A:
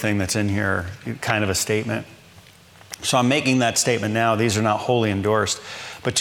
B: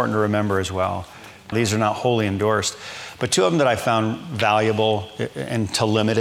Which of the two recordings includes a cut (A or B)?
B